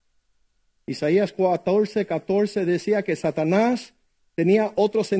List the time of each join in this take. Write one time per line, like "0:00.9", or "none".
none